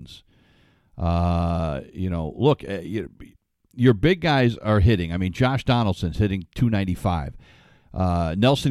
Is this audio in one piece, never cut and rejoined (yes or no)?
yes